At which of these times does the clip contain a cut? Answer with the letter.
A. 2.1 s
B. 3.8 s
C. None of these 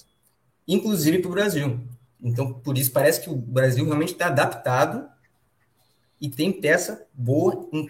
A